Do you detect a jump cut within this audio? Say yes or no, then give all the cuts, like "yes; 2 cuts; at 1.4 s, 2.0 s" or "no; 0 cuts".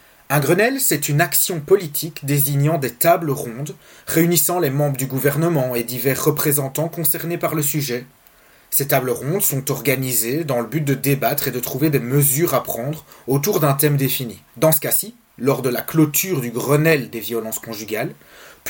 yes; 1 cut; at 14.5 s